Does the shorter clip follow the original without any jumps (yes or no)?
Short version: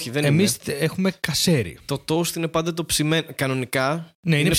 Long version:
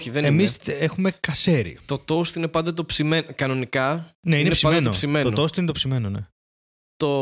yes